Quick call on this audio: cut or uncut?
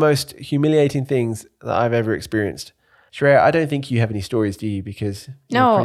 cut